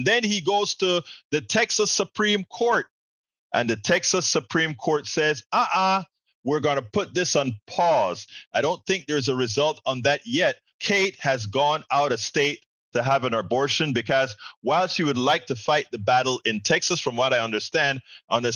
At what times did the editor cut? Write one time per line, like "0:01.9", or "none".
0:08.5
0:10.7